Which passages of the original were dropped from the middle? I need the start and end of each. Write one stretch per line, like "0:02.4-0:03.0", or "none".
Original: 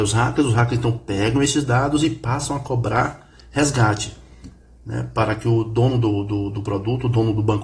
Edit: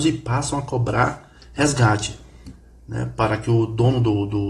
none